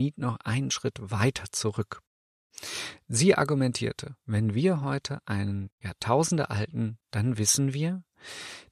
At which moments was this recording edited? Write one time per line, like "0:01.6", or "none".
0:04.2
0:07.0